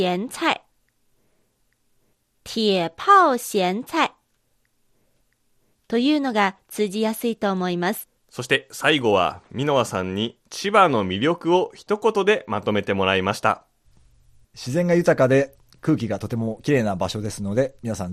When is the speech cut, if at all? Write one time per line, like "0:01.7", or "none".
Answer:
0:08.2